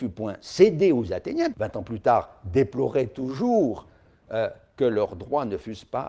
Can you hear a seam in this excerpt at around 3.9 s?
no; 1 cut; at 1.5 s

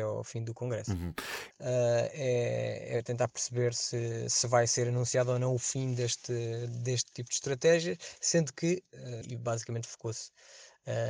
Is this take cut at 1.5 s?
yes; 2 cuts; at 1.5 s, 9.2 s

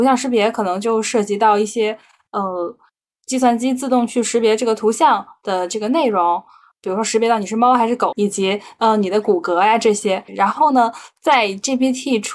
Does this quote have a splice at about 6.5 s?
no; 2 cuts; at 8.1 s, 10.3 s

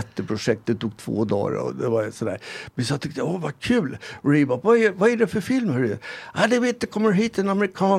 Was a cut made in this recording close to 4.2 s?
no; 0 cuts

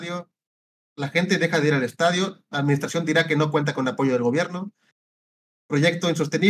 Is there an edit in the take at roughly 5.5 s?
yes; 1 cut; at 5.5 s

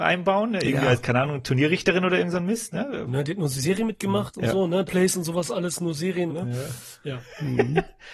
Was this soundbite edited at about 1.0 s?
no; 3 cuts; at 3.1 s, 4.9 s, 6.3 s

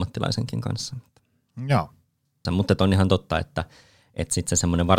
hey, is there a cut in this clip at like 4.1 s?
no; 1 cut; at 2.5 s

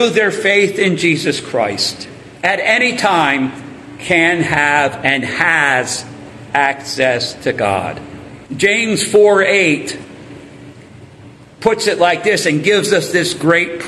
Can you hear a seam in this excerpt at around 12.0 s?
no; 2 cuts; at 2.4 s, 8.4 s

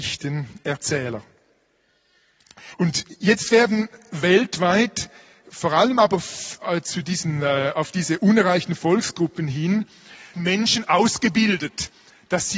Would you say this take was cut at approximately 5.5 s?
no; 2 cuts; at 2.7 s, 10.3 s

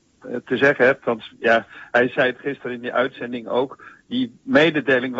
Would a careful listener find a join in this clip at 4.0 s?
no; 0 cuts

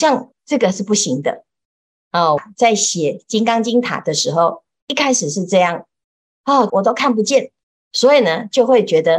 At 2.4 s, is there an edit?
yes; 2 cuts; at 2.4 s, 6.7 s

